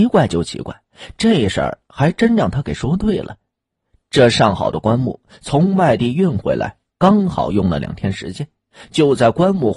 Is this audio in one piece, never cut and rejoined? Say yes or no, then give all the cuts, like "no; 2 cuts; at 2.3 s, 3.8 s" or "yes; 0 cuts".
yes; 0 cuts